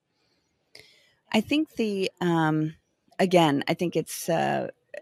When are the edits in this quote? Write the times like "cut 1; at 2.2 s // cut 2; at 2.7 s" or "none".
none